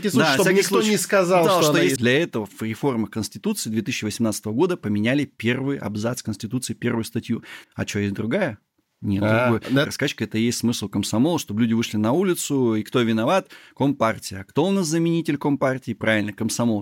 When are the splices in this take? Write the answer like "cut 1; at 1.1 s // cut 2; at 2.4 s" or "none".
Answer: cut 1; at 2.0 s // cut 2; at 7.6 s // cut 3; at 9.8 s